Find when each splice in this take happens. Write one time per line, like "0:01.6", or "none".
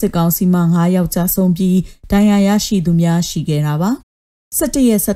0:04.0

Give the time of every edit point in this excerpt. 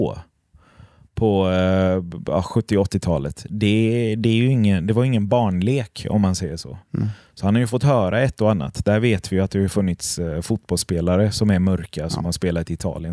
none

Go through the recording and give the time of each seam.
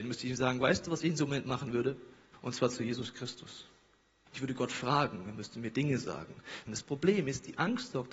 0:02.3
0:06.7

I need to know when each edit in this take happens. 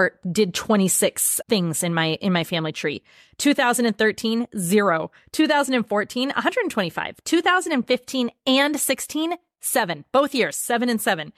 0:01.4

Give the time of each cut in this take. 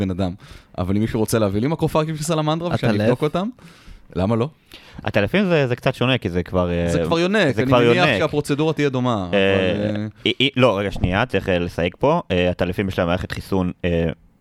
none

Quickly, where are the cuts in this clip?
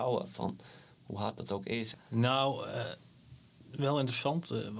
0:01.9

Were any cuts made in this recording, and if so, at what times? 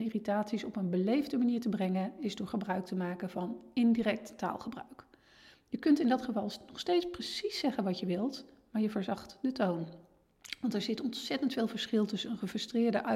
none

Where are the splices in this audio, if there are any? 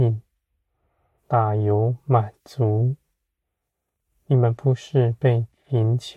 0:01.2

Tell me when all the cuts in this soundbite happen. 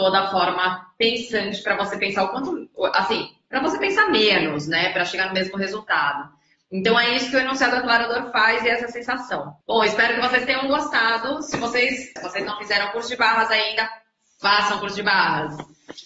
0:09.6
0:12.2

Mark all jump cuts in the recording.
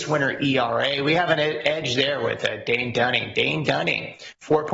none

